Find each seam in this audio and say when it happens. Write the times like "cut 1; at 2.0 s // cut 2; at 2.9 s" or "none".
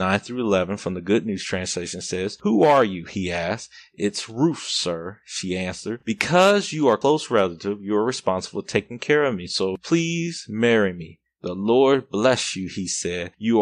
none